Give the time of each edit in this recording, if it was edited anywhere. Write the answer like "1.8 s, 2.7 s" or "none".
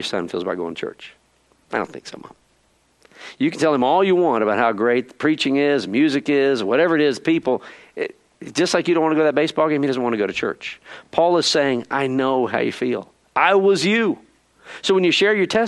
none